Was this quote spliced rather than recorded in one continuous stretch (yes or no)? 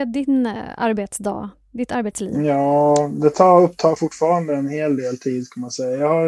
no